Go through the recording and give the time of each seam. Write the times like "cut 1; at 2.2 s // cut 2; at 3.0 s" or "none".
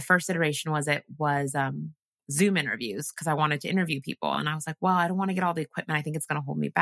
none